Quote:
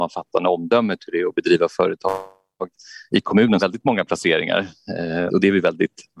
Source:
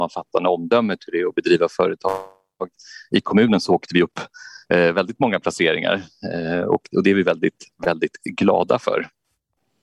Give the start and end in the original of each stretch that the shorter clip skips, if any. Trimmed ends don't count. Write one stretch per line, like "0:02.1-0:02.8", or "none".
0:03.6-0:04.9
0:06.6-0:06.9